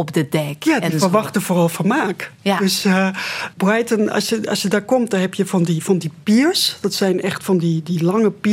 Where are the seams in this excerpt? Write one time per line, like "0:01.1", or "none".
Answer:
0:03.5